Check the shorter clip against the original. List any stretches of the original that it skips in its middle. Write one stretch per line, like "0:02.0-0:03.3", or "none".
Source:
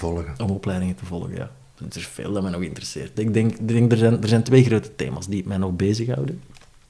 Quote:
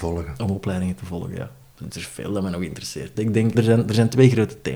0:03.5-0:03.9